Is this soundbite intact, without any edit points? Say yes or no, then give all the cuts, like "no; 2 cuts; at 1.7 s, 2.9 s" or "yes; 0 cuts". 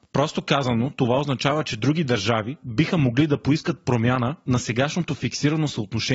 yes; 0 cuts